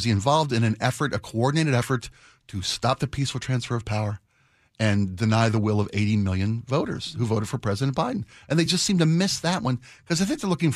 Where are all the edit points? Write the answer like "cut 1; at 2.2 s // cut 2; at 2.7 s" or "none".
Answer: none